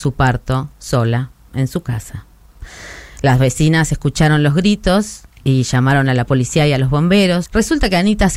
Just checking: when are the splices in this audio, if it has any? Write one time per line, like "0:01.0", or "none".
0:07.5